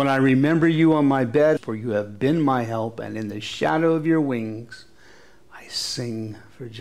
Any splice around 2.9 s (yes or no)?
no